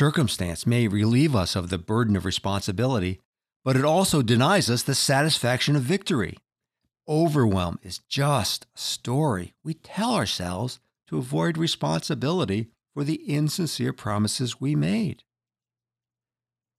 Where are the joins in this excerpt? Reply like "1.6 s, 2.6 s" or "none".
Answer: 6.9 s